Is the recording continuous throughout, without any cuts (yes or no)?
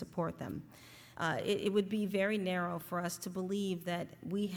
no